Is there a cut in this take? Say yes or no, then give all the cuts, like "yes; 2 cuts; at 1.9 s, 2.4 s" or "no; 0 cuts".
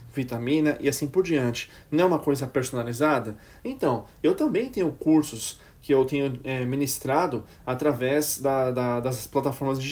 no; 0 cuts